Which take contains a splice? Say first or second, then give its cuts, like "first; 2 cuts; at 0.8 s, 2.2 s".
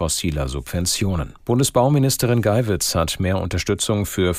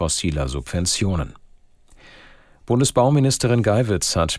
first; 1 cut; at 1.4 s